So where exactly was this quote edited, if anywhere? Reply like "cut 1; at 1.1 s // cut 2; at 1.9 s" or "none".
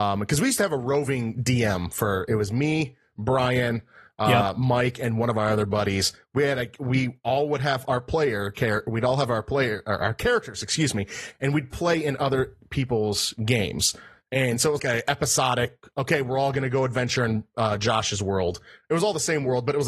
cut 1; at 14.8 s